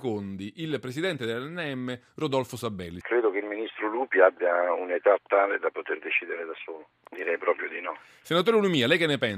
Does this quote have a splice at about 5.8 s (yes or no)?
no